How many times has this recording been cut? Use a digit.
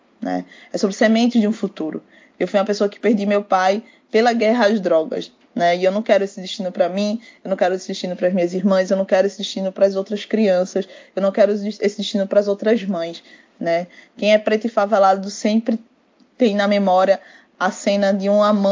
0